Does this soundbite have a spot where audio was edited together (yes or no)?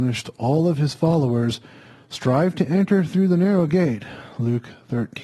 no